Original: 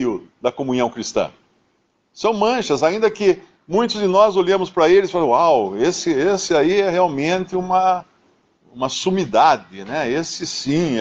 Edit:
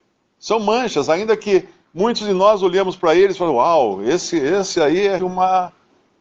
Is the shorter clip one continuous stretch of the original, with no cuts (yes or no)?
no